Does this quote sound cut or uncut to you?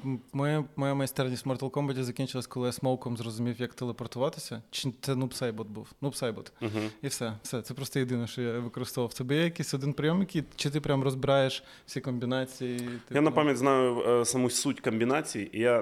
uncut